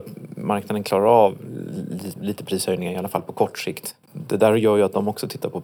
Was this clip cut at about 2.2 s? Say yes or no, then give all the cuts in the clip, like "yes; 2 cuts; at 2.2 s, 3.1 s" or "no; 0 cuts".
yes; 2 cuts; at 2.2 s, 4.0 s